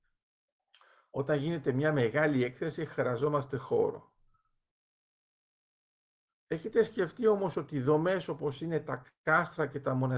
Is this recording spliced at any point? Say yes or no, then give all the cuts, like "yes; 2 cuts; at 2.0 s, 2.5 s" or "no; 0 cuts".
no; 0 cuts